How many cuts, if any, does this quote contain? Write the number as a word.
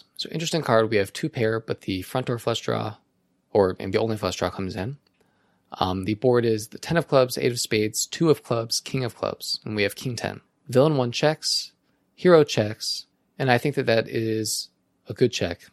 zero